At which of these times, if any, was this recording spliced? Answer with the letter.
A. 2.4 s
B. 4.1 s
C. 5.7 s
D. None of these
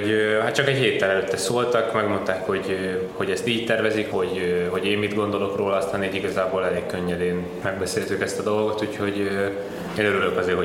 B